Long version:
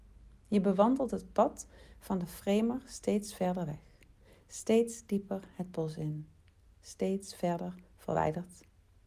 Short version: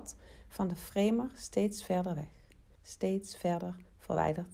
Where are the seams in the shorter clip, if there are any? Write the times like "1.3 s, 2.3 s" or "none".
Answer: 2.7 s